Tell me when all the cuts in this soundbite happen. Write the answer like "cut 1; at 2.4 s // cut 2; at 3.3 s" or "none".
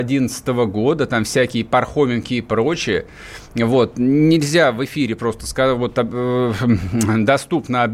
none